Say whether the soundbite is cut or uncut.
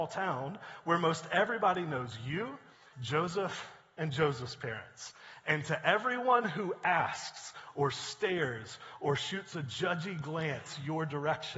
cut